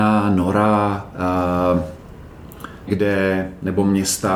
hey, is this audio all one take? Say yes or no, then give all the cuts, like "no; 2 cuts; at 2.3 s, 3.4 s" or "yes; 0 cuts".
no; 1 cut; at 2.9 s